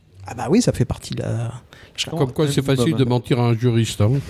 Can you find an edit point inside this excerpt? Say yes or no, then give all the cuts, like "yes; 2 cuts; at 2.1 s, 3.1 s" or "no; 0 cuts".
yes; 1 cut; at 2.1 s